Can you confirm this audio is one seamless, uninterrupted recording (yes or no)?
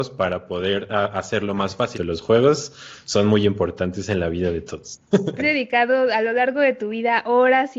no